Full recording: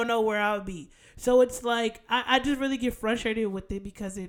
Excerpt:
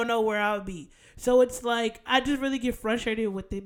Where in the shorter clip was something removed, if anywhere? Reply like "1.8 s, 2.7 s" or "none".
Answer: 2.1 s